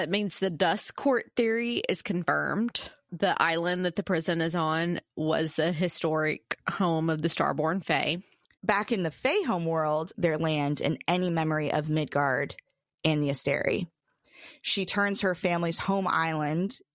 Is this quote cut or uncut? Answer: cut